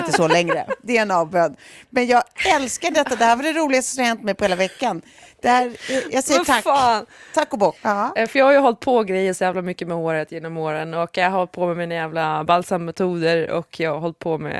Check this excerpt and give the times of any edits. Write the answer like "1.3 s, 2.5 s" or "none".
7.8 s